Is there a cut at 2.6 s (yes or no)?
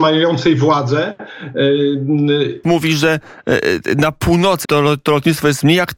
yes